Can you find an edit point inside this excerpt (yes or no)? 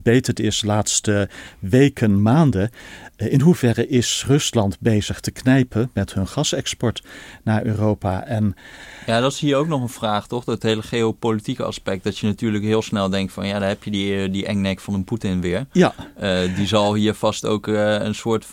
no